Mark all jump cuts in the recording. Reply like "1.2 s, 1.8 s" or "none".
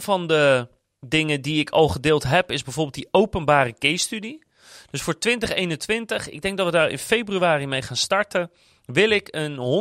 none